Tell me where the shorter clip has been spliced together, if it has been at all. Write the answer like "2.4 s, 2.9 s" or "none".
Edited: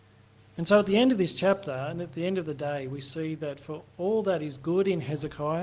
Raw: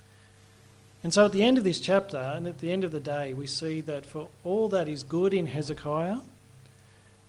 none